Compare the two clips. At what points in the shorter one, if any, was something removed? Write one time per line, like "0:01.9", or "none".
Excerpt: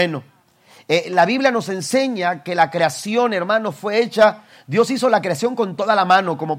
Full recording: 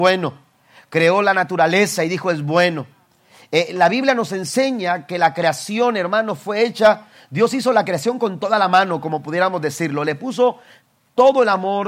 none